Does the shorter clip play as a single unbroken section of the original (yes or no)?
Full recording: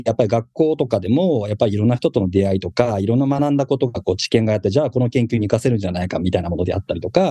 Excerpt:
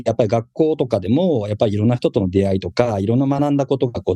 yes